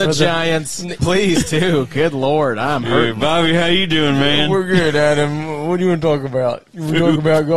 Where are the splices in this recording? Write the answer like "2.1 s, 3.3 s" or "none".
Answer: 1.0 s